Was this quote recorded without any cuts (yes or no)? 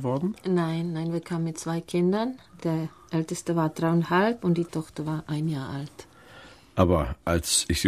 yes